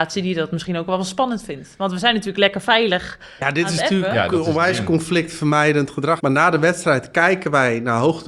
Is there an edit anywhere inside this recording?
yes; 1 cut; at 6.2 s

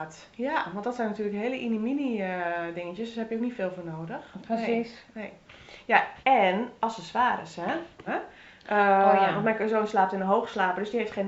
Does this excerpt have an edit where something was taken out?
yes; 2 cuts; at 6.2 s, 8.1 s

